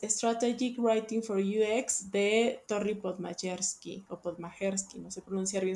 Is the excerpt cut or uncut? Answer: uncut